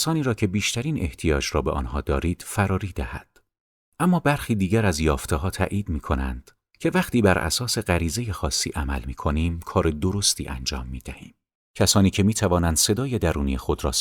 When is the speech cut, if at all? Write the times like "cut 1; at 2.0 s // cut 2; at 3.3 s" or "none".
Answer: cut 1; at 11.7 s